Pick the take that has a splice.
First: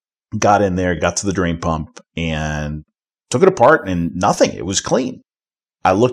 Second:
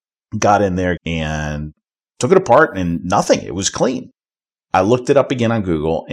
second; 1 cut; at 1.0 s

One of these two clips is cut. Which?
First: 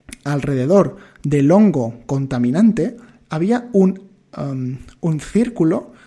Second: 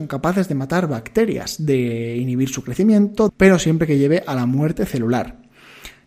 second; 1 cut; at 3.3 s

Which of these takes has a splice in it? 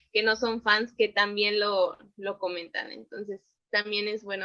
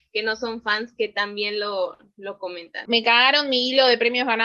second; 1 cut; at 2.9 s

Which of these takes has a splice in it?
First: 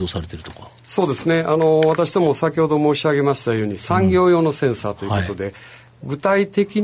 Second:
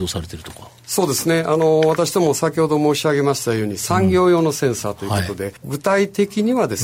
second; 1 cut; at 5.6 s

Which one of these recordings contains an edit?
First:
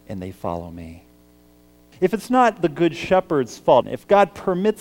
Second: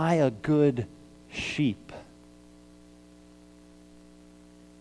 first; 2 cuts; at 1.9 s, 3.8 s

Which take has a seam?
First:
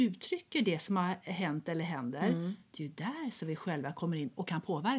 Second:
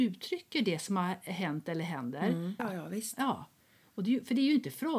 second; 1 cut; at 2.6 s

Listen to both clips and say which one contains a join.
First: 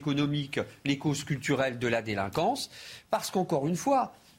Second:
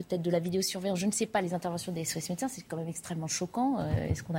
first; 1 cut; at 3.1 s

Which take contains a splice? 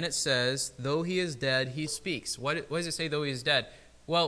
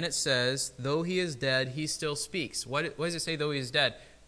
first; 1 cut; at 1.9 s

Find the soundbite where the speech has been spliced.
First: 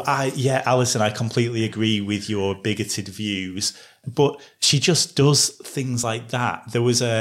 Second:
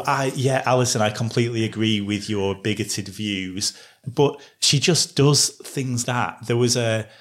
second; 1 cut; at 6.0 s

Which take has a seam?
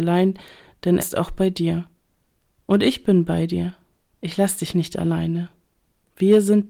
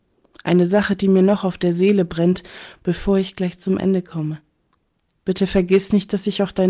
first; 1 cut; at 1.0 s

